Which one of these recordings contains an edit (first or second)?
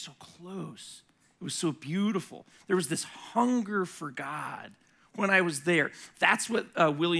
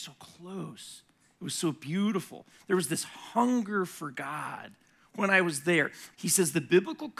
second